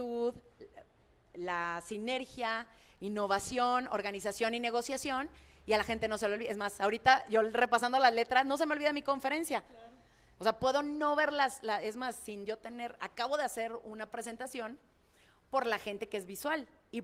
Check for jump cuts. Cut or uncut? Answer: uncut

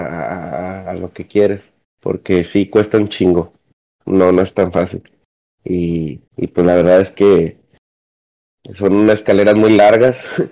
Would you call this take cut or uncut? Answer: cut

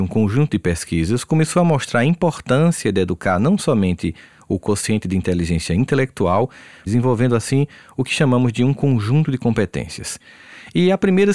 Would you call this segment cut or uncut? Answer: cut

